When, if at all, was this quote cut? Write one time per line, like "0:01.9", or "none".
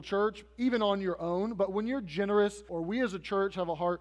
0:02.7